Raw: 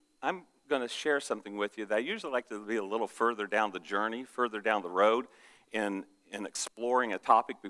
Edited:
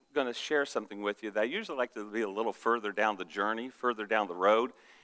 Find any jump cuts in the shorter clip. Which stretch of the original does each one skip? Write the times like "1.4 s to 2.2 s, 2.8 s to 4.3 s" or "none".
none